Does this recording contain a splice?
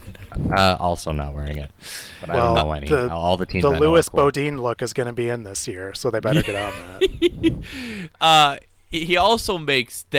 no; 0 cuts

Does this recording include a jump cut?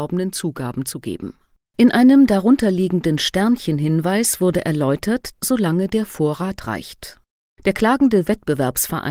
yes; 3 cuts; at 1.6 s, 5.3 s, 7.6 s

